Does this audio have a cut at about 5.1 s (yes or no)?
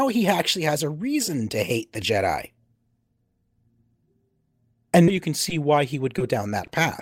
yes